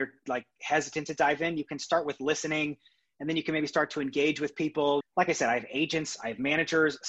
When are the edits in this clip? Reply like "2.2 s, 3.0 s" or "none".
5.0 s